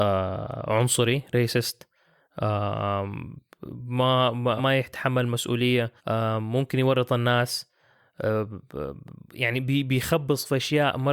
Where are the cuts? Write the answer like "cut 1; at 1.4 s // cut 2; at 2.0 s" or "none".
cut 1; at 4.6 s // cut 2; at 6.0 s